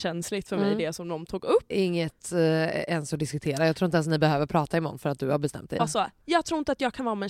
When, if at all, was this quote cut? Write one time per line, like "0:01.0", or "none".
0:01.7
0:05.8